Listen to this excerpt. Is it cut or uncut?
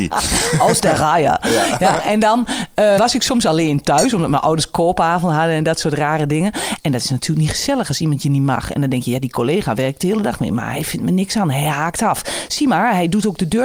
cut